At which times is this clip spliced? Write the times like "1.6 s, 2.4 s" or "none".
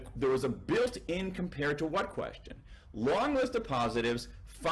none